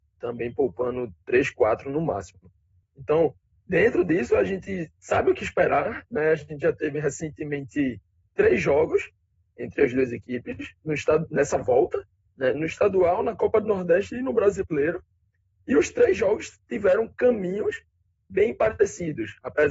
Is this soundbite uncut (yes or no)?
yes